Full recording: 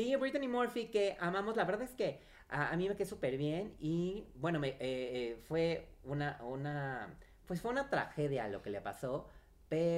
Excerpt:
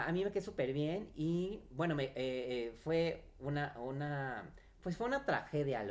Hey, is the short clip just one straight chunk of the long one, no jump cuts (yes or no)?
yes